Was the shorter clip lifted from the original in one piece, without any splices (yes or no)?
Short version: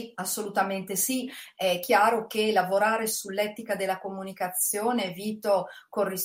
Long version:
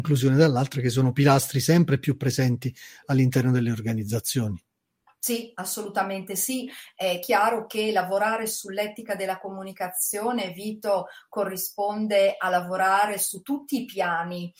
yes